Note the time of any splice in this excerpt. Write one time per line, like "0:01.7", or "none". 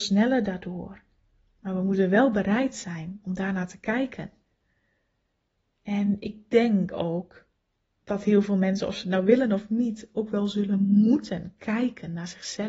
none